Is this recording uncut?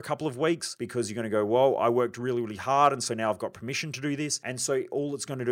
yes; 0 cuts

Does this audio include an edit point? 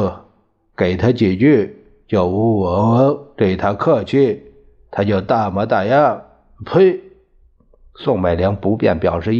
no; 0 cuts

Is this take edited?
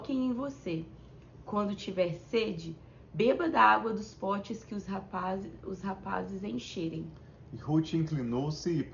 no; 0 cuts

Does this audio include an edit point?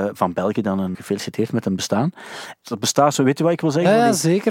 yes; 2 cuts; at 0.9 s, 2.6 s

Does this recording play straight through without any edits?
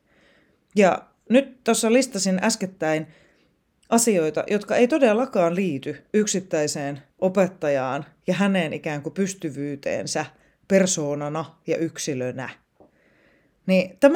yes; 0 cuts

